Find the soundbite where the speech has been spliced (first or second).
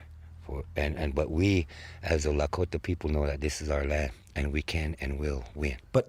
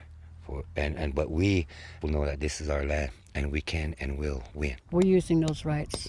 second